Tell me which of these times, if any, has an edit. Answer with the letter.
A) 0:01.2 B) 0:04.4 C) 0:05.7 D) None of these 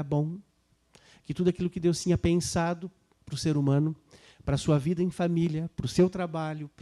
D